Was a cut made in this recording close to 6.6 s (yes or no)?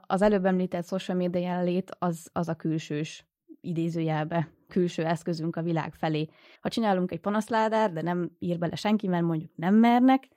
yes